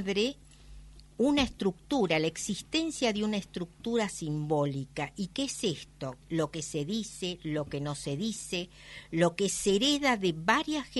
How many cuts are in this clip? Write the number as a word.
one